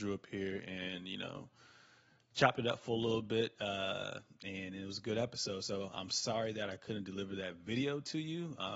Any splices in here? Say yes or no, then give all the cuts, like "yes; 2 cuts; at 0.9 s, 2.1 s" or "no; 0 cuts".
no; 0 cuts